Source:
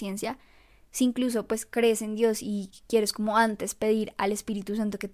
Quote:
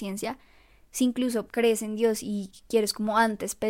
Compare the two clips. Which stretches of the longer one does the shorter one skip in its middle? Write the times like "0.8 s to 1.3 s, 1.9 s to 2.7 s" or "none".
1.5 s to 1.7 s